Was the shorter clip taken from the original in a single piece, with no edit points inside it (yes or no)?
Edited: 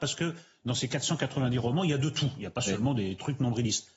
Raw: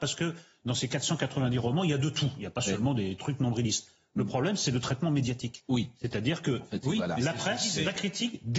yes